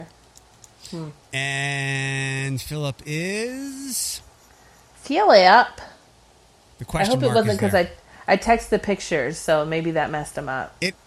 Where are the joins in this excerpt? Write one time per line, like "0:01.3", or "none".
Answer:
none